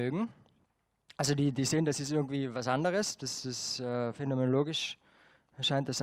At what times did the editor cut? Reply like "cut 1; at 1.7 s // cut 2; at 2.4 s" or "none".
cut 1; at 1.5 s